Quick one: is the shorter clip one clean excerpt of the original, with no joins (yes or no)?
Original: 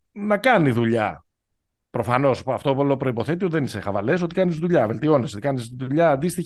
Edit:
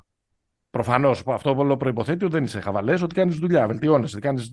yes